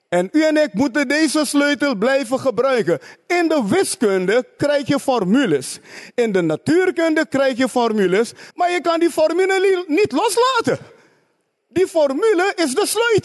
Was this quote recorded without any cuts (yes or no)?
no